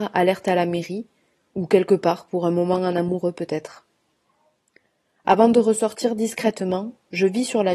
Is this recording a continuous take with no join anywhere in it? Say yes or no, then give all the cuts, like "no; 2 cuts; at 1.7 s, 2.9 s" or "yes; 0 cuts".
yes; 0 cuts